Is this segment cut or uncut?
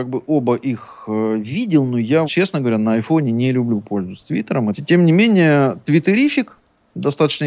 cut